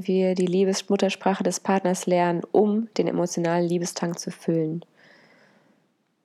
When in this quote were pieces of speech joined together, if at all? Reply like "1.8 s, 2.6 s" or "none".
none